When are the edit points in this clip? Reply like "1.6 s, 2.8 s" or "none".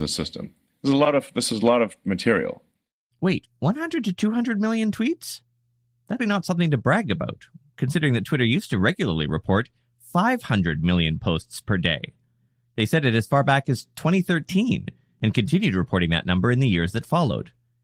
6.2 s